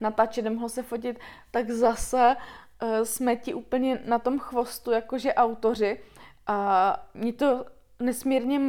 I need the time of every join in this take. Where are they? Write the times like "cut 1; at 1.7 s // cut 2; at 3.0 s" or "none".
none